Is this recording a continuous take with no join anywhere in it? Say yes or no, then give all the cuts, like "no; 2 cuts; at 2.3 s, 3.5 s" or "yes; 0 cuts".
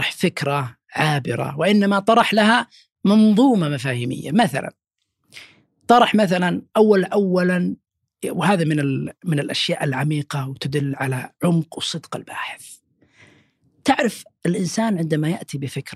yes; 0 cuts